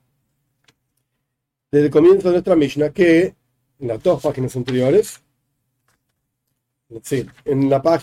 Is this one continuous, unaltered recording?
yes; 0 cuts

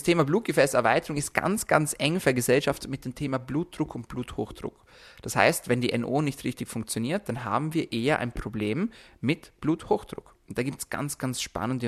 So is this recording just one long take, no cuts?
yes; 0 cuts

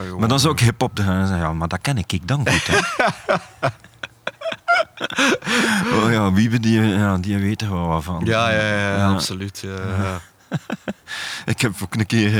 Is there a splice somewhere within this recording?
no; 0 cuts

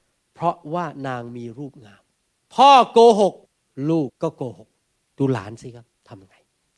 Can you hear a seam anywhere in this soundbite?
yes; 1 cut; at 4.1 s

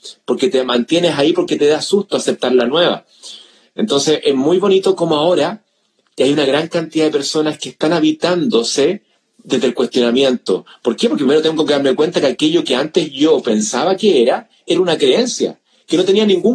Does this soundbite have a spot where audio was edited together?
no; 0 cuts

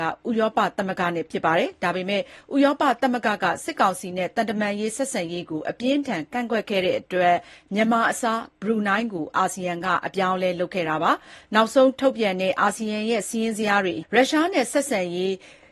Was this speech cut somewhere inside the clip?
yes; 1 cut; at 14.0 s

